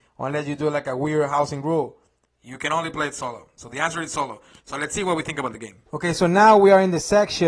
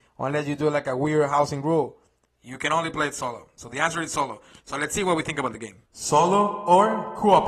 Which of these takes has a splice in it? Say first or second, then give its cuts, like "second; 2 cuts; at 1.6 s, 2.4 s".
first; 1 cut; at 5.9 s